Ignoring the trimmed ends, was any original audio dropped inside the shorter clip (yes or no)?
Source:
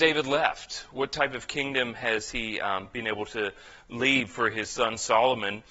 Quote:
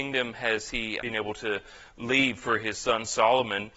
yes